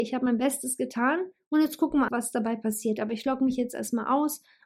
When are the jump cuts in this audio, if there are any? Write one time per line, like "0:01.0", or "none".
0:02.1